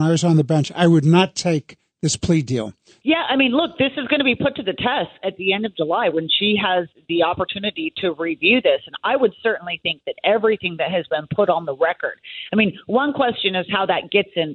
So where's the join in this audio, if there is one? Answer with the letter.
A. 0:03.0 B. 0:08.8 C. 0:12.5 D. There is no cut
A